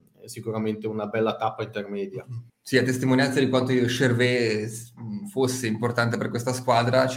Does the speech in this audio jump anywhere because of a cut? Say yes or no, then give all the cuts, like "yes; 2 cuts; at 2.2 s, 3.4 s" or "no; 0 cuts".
yes; 1 cut; at 2.5 s